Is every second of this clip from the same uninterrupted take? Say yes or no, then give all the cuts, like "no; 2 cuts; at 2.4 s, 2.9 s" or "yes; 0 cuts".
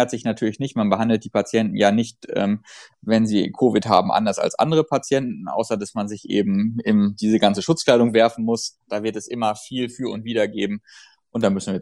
no; 1 cut; at 8.8 s